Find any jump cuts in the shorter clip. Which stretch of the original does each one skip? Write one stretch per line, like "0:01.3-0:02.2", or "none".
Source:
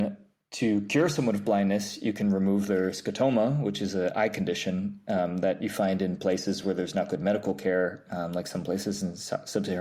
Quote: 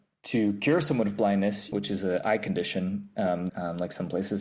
0:02.0-0:03.6
0:05.4-0:08.0